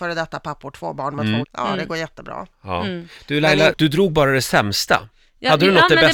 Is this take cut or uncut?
cut